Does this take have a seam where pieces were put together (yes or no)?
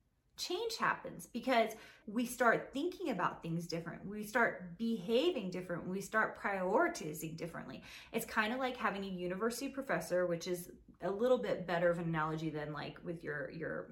yes